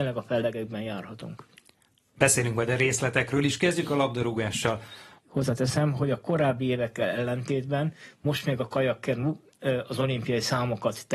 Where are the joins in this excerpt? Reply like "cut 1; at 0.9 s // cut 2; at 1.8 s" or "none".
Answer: cut 1; at 5.2 s